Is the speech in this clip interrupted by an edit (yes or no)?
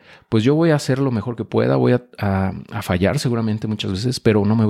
no